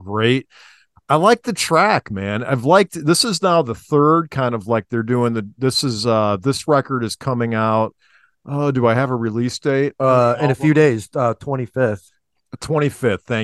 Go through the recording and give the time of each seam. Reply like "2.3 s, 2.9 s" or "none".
none